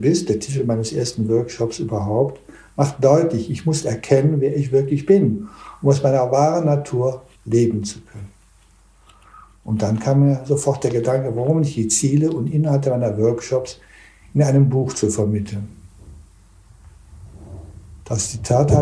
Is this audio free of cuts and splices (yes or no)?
no